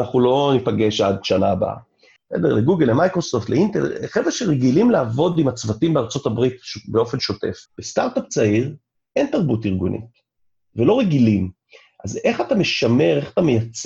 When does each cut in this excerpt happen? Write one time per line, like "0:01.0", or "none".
0:02.2
0:07.7